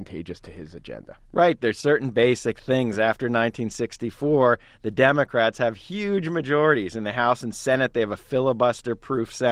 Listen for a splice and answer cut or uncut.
uncut